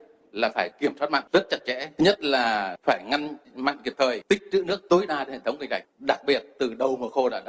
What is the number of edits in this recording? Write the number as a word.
zero